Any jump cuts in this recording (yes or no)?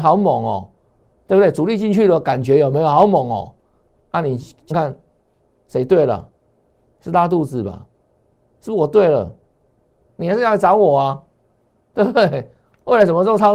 yes